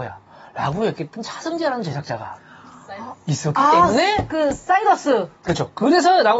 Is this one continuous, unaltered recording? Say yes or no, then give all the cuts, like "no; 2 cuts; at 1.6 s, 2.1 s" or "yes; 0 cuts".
yes; 0 cuts